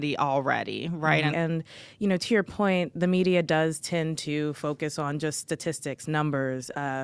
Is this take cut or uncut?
cut